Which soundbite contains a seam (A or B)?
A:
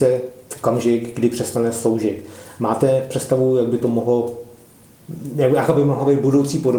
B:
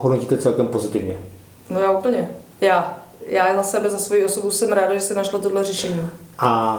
B